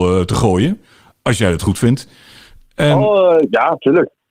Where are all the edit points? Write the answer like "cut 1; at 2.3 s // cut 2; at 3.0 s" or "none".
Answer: none

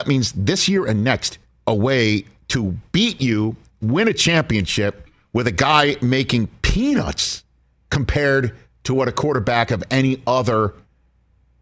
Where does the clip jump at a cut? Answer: cut 1; at 1.5 s

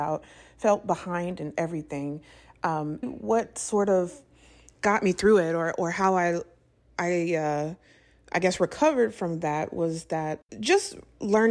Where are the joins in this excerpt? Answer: cut 1; at 3.0 s

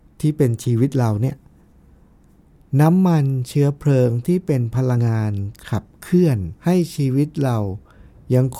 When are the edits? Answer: cut 1; at 5.0 s // cut 2; at 6.6 s

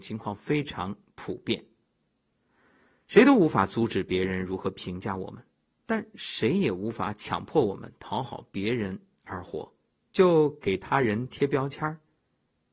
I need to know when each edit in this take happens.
cut 1; at 10.1 s

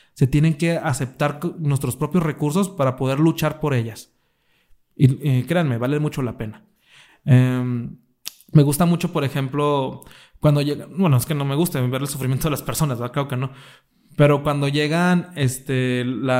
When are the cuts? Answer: none

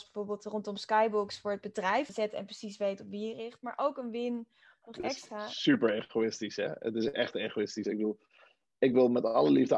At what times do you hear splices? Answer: cut 1; at 2.1 s // cut 2; at 7.8 s

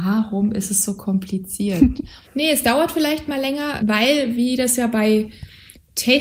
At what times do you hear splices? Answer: cut 1; at 2.2 s // cut 2; at 3.8 s

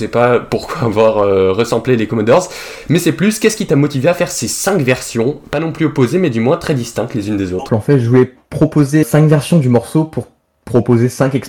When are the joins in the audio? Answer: cut 1; at 7.7 s // cut 2; at 9.0 s

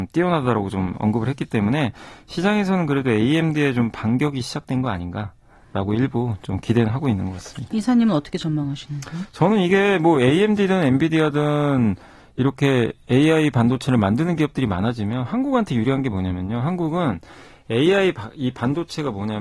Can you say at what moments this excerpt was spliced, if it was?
none

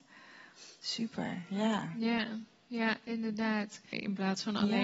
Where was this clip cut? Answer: cut 1; at 3.9 s

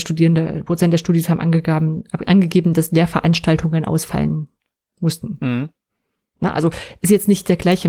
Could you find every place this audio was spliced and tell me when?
none

